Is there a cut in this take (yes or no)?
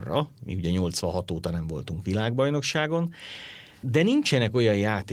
yes